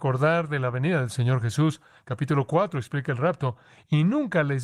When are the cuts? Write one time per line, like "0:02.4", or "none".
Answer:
none